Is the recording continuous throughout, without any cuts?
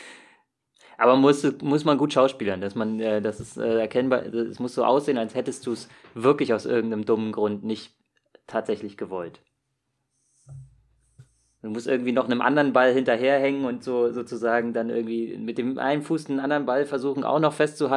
yes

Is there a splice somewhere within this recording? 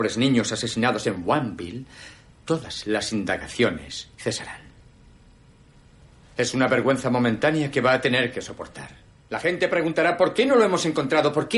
yes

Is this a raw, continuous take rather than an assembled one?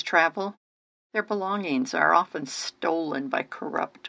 yes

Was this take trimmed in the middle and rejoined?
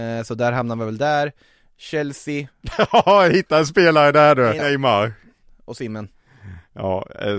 yes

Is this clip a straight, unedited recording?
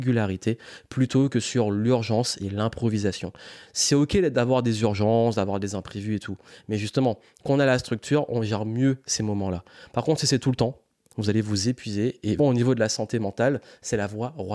no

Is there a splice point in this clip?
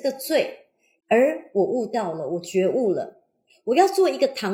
yes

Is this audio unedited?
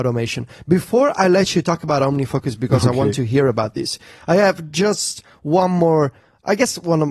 yes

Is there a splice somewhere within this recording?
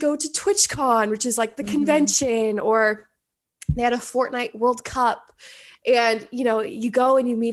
no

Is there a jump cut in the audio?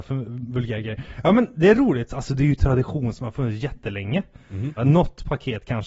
yes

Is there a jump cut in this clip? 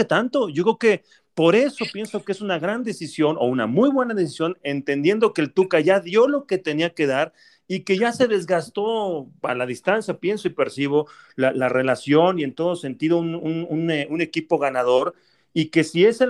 no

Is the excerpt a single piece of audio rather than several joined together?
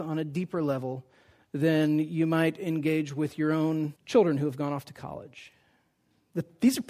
no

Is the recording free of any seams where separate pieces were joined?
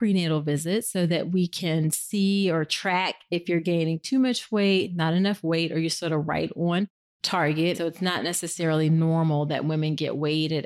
no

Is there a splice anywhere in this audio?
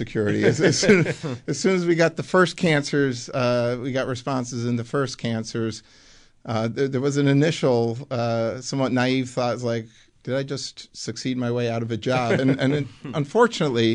no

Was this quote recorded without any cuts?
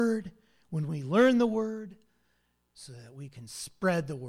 no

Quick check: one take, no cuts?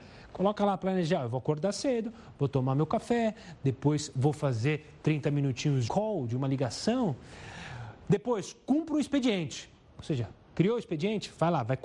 no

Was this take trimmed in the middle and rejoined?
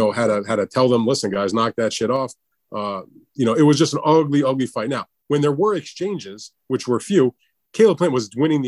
no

